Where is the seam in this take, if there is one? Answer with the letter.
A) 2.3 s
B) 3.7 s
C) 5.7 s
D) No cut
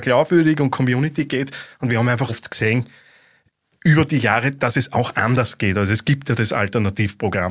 A